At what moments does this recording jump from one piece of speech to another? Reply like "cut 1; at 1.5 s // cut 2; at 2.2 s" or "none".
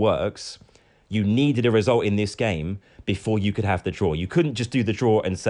none

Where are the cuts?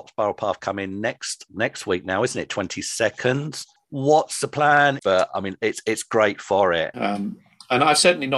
cut 1; at 5.0 s // cut 2; at 6.9 s

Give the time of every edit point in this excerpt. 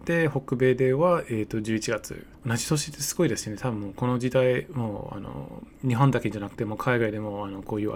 cut 1; at 2.3 s

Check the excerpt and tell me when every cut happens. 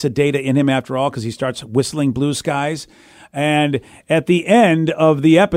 none

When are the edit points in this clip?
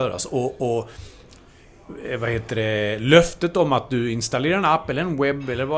none

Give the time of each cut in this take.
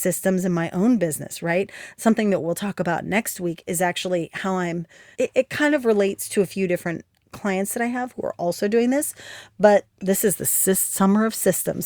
cut 1; at 5.1 s

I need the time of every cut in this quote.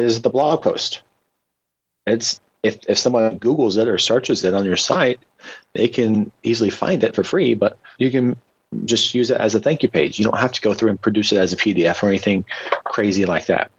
none

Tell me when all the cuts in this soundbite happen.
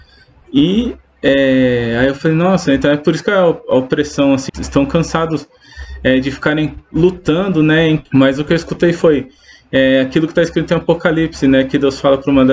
cut 1; at 4.5 s // cut 2; at 8.1 s

